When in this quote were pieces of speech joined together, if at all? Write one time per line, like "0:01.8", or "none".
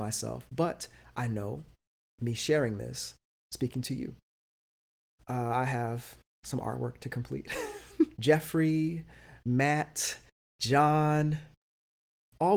0:05.2
0:08.2